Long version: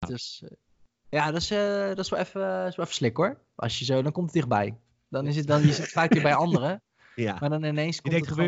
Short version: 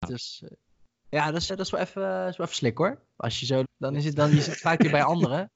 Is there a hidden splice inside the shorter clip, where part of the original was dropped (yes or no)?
yes